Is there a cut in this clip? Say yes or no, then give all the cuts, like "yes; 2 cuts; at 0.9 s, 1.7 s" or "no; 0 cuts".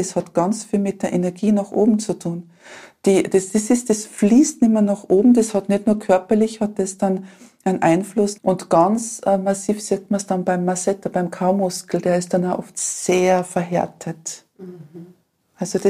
yes; 1 cut; at 8.4 s